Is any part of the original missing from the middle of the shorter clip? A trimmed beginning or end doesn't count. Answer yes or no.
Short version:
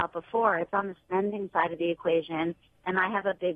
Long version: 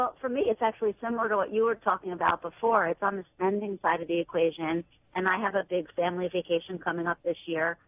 no